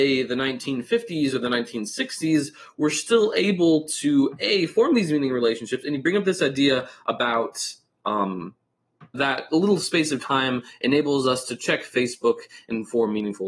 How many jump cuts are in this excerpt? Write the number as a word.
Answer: one